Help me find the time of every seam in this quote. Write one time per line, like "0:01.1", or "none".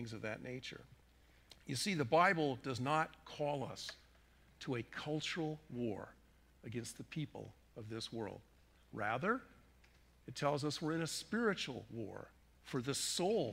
none